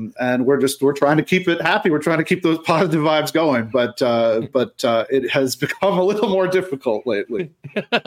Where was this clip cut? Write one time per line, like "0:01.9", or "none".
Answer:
none